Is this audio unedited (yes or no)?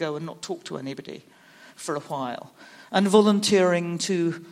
yes